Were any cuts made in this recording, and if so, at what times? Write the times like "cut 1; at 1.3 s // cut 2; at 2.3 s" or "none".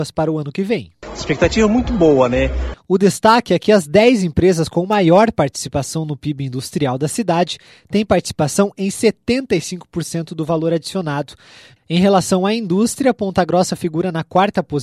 cut 1; at 2.7 s // cut 2; at 11.8 s